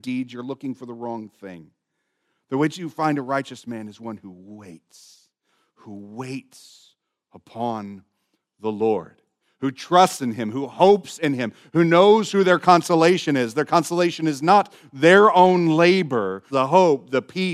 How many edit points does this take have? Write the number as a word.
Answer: one